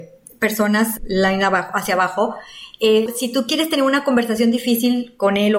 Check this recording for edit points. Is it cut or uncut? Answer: cut